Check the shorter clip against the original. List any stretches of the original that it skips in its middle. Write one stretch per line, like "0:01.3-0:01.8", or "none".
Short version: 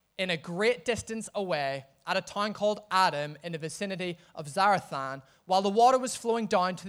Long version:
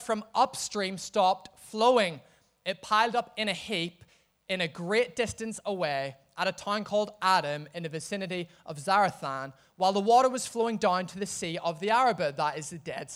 none